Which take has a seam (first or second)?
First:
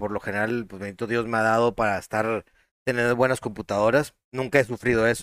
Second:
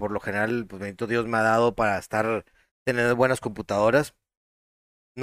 first